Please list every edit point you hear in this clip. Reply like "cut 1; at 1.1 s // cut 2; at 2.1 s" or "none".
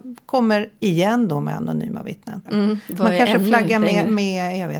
cut 1; at 2.5 s